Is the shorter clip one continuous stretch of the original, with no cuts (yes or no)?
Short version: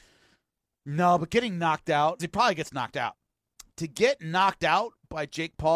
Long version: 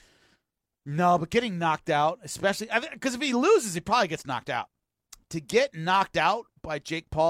no